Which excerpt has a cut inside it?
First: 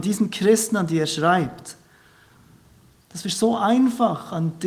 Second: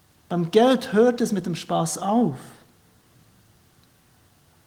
first; 1 cut; at 3.0 s

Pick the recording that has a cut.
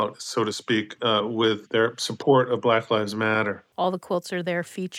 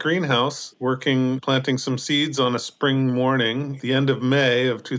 first; 1 cut; at 3.7 s

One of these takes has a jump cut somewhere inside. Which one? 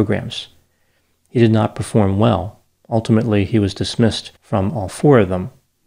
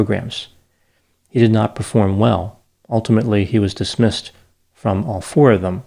first; 1 cut; at 4.4 s

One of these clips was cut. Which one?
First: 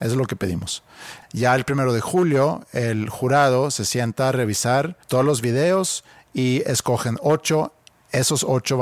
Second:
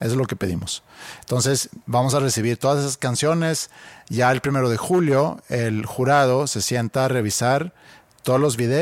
first; 2 cuts; at 1.2 s, 5.0 s

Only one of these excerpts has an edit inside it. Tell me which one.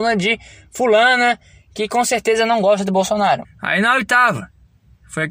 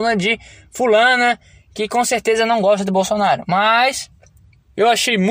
first; 1 cut; at 3.4 s

